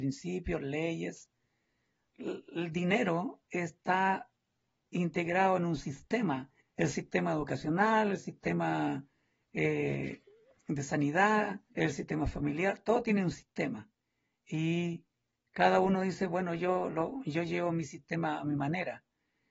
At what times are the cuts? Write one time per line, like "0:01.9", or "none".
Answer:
0:06.6
0:11.7